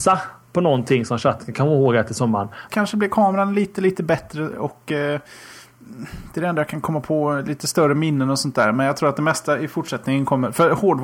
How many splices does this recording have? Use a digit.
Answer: 1